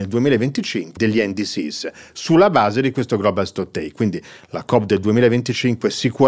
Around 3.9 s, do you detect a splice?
no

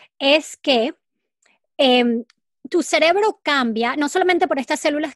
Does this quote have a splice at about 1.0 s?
no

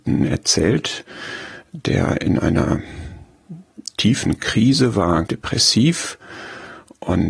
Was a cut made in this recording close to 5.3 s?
yes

